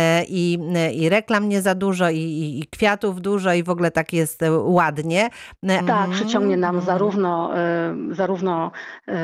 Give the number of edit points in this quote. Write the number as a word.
one